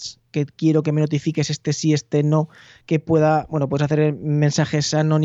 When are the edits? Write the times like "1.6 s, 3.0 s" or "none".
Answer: 2.8 s